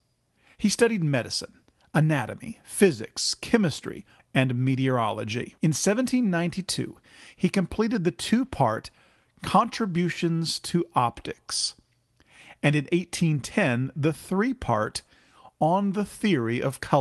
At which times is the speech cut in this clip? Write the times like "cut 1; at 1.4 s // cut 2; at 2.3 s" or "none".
cut 1; at 4.2 s // cut 2; at 5.6 s